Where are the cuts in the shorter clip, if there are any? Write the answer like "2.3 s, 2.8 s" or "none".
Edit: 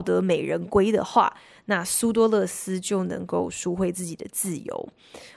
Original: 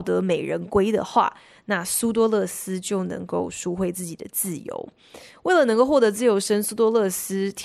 none